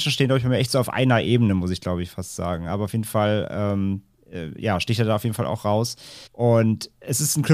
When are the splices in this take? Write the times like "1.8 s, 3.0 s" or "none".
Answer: 6.3 s